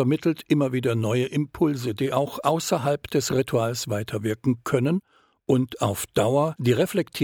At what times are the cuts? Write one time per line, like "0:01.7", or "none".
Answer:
none